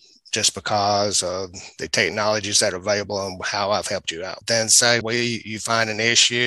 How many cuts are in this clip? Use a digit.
1